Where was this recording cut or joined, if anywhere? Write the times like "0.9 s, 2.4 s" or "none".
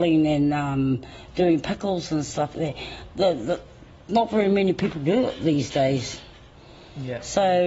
2.5 s